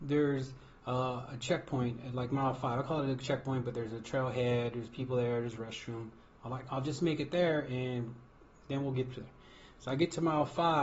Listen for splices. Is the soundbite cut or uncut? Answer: uncut